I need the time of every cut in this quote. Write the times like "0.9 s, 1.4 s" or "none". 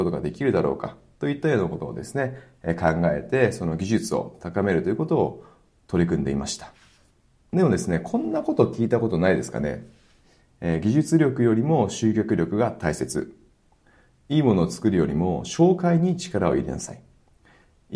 none